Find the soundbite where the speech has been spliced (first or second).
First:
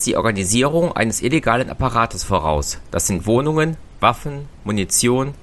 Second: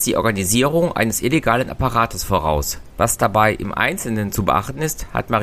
second